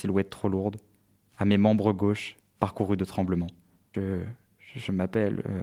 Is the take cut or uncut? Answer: cut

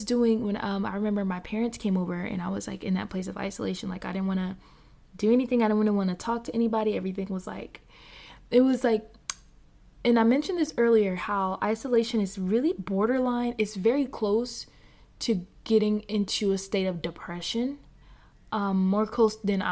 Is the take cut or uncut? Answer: uncut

